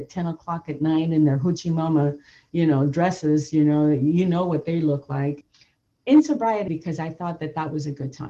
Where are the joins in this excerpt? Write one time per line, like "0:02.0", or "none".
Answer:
0:05.4
0:06.7